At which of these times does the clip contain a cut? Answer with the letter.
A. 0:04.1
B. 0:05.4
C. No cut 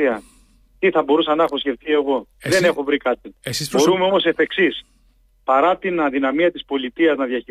C